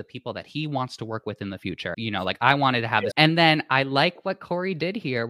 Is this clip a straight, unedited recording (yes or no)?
no